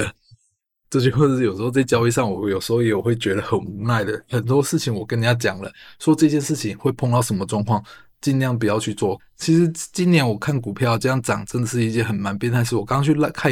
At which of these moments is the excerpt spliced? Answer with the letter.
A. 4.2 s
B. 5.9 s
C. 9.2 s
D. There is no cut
C